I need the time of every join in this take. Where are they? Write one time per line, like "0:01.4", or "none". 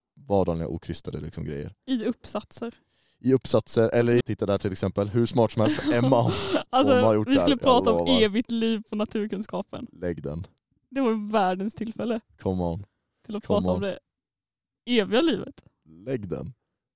0:04.2